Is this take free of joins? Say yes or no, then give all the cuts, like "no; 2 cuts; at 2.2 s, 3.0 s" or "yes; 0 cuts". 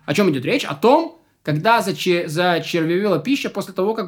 yes; 0 cuts